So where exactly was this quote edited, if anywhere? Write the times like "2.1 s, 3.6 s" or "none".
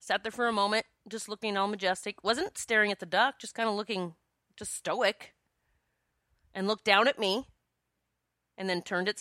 none